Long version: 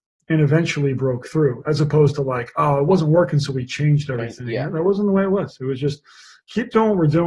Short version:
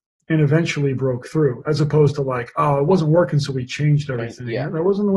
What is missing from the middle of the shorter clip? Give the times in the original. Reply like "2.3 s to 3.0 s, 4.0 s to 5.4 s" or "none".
none